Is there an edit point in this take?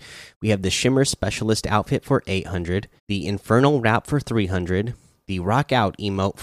yes; 1 cut; at 3.0 s

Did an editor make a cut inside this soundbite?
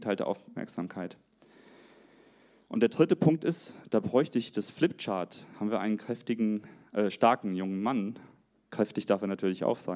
no; 0 cuts

